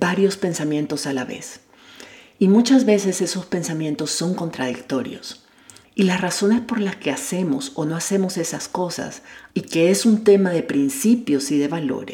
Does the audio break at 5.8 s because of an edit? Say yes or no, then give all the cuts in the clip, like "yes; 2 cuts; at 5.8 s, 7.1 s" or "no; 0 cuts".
yes; 2 cuts; at 5.8 s, 9.5 s